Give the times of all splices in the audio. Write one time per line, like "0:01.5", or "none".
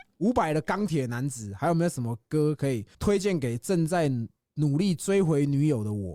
0:02.9